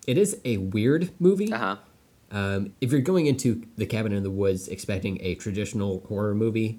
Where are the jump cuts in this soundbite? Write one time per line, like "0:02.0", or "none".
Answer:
0:02.7